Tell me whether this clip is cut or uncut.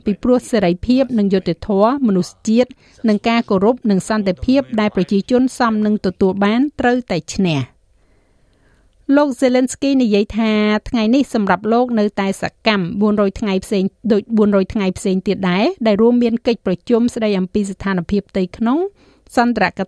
uncut